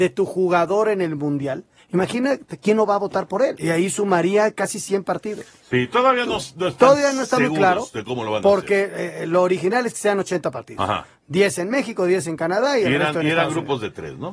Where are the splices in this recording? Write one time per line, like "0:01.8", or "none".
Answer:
0:01.8
0:03.6